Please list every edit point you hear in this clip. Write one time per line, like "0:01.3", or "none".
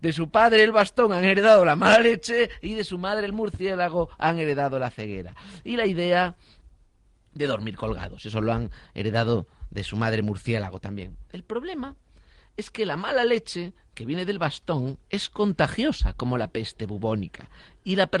none